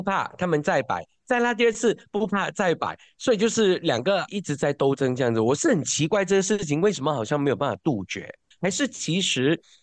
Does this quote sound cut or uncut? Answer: cut